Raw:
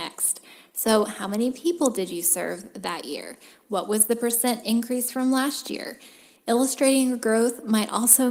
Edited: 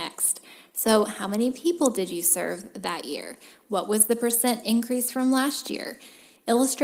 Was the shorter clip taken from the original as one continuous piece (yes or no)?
yes